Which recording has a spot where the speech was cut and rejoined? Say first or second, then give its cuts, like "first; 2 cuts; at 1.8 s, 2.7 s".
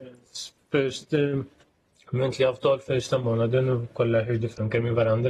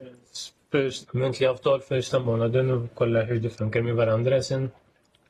second; 1 cut; at 1.1 s